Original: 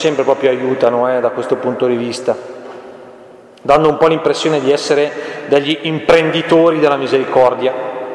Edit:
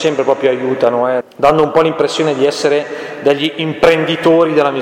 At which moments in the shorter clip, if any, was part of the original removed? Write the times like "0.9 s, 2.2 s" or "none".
1.2 s